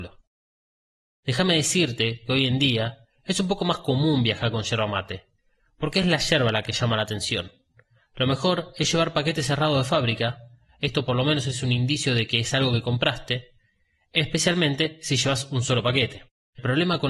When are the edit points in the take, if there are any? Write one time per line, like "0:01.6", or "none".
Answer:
none